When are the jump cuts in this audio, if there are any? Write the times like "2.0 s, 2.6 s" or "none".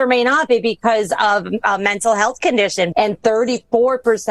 2.9 s